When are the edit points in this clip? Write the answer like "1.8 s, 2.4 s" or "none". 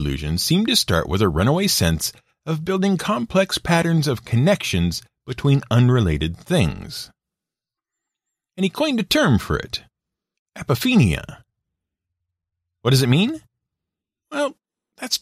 none